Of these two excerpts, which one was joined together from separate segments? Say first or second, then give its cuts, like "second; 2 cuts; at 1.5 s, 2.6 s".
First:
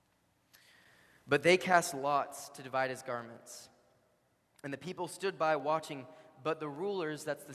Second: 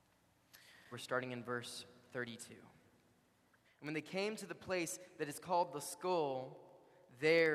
second; 2 cuts; at 0.9 s, 3.6 s